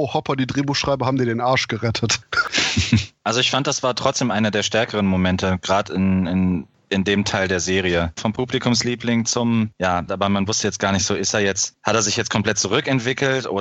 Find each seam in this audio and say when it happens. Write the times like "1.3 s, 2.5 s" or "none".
8.2 s, 10.1 s

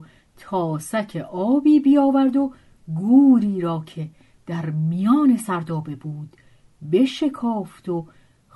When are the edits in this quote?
none

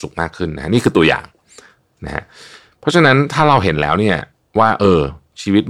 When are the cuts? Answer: none

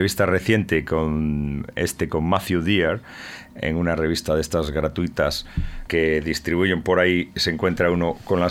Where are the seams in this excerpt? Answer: 5.9 s

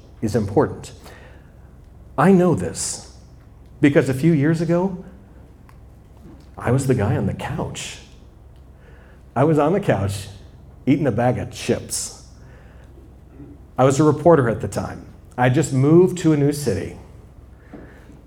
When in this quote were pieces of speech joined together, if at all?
none

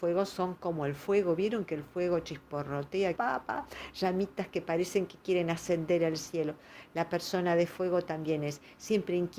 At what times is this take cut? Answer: 3.2 s

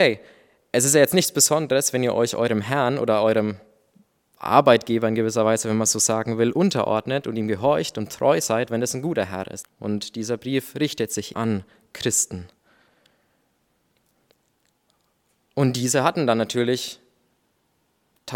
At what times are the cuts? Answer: 9.6 s, 11.3 s

